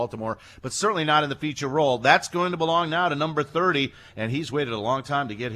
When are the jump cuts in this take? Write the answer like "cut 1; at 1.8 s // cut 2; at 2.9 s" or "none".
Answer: none